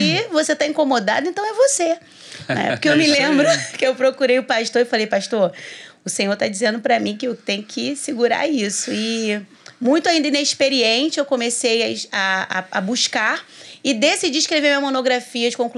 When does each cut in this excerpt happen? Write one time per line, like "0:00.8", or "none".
none